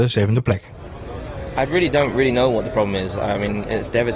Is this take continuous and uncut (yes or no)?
yes